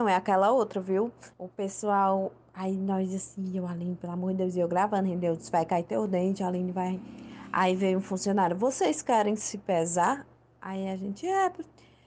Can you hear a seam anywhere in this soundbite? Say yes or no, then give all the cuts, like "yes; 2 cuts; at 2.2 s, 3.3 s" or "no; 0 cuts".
yes; 1 cut; at 1.3 s